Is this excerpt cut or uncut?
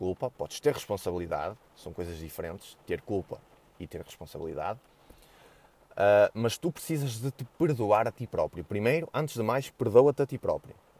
uncut